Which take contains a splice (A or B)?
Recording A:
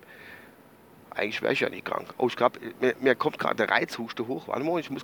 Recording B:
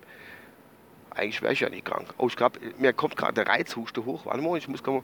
B